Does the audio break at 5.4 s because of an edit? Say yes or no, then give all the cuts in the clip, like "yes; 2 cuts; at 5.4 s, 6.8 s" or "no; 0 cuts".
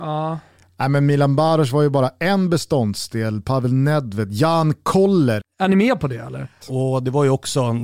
yes; 2 cuts; at 5.4 s, 6.6 s